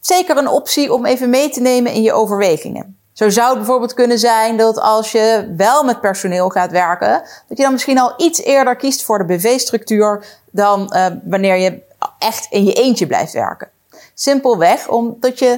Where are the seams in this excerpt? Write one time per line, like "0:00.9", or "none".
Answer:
none